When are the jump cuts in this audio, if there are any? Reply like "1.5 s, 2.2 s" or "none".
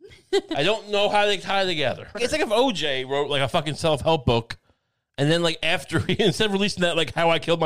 2.1 s